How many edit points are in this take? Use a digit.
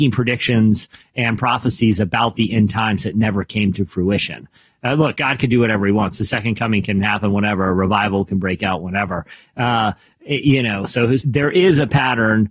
1